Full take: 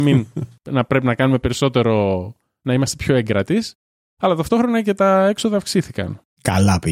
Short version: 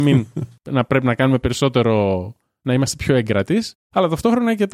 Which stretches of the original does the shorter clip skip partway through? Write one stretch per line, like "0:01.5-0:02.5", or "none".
0:03.8-0:04.1